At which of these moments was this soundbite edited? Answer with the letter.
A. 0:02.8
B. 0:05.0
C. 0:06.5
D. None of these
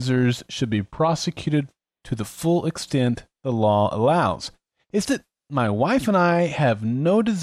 B